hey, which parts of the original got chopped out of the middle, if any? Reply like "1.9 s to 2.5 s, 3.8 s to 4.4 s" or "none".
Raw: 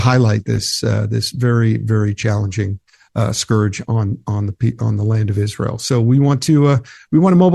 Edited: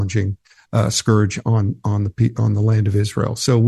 none

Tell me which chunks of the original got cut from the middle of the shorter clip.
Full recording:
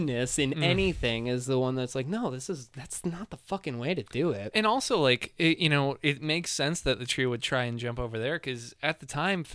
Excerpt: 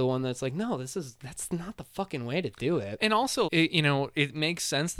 5.0 s to 5.3 s

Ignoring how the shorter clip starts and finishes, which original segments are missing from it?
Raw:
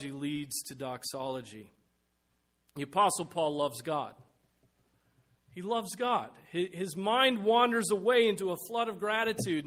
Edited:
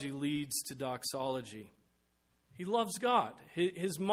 2.4 s to 5.4 s

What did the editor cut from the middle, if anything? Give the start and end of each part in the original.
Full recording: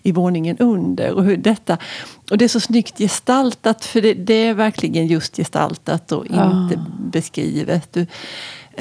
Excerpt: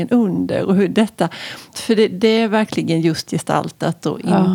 2.2 s to 3.8 s

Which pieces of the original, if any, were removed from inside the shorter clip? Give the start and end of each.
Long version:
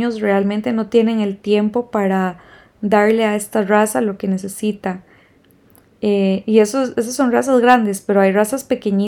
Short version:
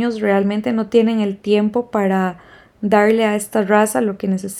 none

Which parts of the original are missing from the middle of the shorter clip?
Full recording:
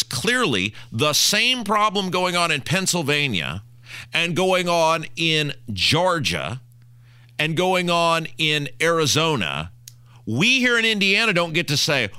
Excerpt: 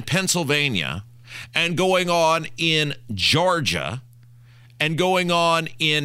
none

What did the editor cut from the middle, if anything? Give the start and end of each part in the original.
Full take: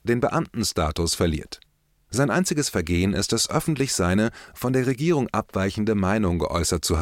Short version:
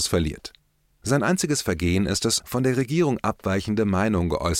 3.5 s to 4.5 s

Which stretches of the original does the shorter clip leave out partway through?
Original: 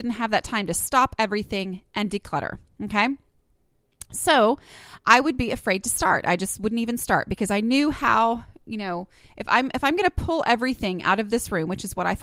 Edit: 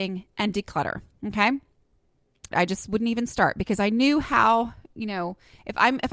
4.1 s to 6.2 s

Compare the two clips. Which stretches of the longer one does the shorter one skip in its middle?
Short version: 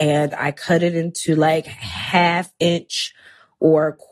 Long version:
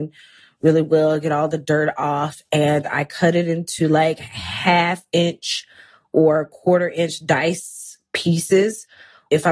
none

